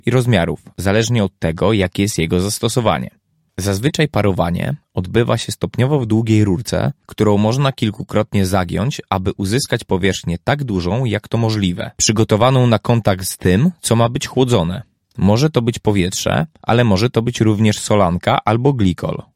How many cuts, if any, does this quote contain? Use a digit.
0